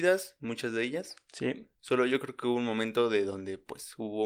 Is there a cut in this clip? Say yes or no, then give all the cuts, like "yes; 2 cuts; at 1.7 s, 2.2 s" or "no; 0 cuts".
no; 0 cuts